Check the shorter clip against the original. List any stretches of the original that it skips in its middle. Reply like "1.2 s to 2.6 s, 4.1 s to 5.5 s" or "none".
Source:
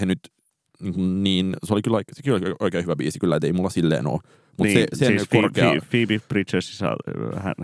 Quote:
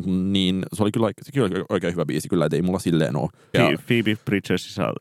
4.4 s to 5.6 s